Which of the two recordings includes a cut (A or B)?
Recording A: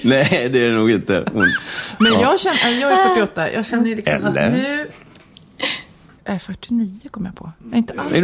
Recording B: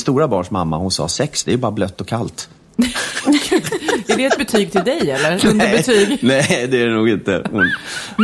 A